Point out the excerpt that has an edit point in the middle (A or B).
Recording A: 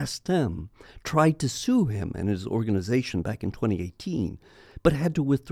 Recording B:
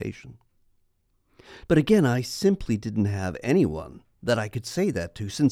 B